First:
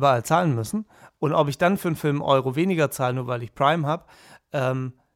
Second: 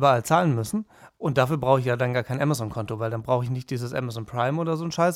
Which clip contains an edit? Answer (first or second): first